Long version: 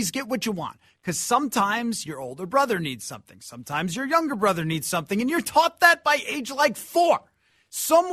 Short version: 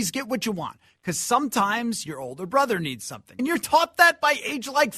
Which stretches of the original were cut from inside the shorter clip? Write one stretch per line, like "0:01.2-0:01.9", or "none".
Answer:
0:03.4-0:05.2